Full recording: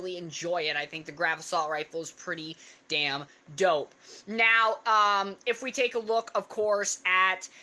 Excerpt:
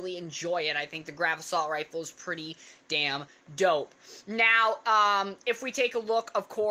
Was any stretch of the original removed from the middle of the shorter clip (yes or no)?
no